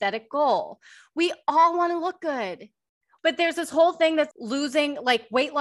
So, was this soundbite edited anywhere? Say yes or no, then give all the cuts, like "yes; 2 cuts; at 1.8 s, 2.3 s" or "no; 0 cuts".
yes; 2 cuts; at 3.2 s, 4.3 s